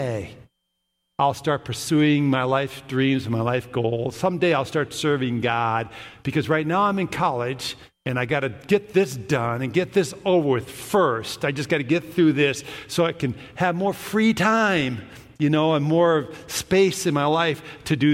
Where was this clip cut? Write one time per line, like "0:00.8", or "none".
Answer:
none

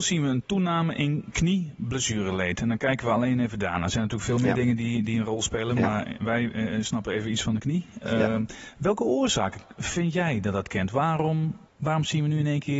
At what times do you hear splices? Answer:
0:11.7

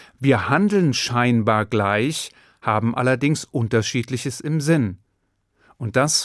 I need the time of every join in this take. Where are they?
none

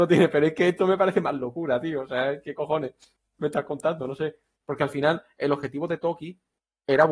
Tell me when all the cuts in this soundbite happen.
none

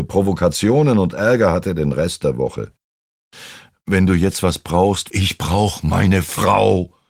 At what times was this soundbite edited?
0:05.1

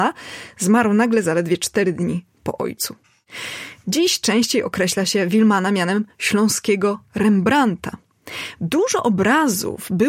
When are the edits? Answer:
0:03.8
0:08.6

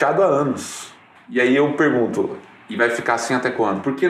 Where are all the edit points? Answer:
0:01.2

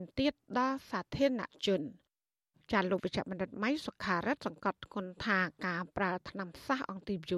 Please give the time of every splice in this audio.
none

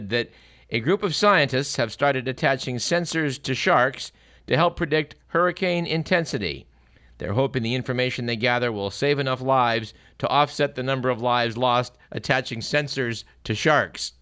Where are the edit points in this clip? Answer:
none

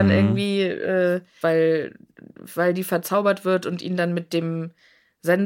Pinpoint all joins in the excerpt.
0:01.4

